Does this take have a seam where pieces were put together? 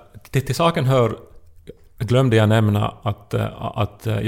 no; 0 cuts

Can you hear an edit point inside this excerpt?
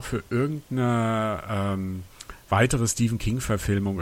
no; 0 cuts

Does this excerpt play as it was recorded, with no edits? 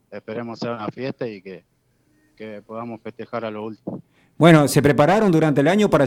yes; 0 cuts

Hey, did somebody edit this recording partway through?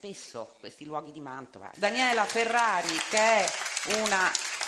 yes; 1 cut; at 1.7 s

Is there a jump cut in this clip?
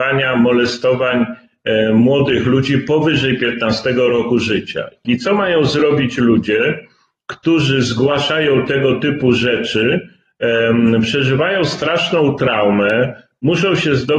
yes; 1 cut; at 5.0 s

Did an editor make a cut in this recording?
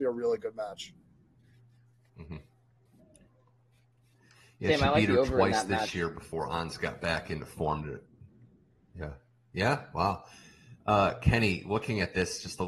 no; 0 cuts

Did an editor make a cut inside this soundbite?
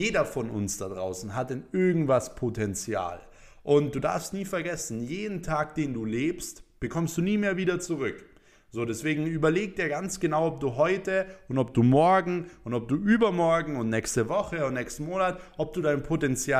no; 0 cuts

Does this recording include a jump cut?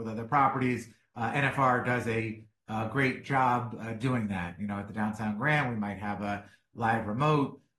no; 0 cuts

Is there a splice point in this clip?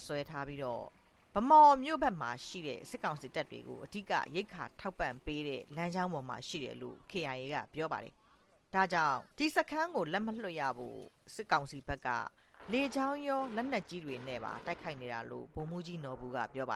yes; 1 cut; at 9.3 s

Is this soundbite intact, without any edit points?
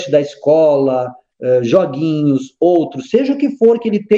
yes; 0 cuts

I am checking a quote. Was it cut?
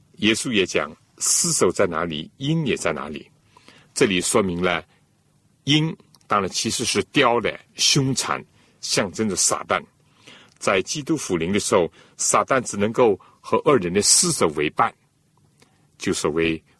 no; 0 cuts

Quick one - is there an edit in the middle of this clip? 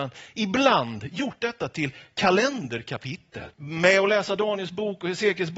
yes; 1 cut; at 3.5 s

